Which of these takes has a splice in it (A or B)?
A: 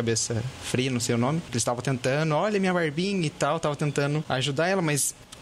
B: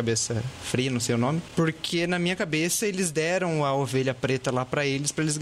A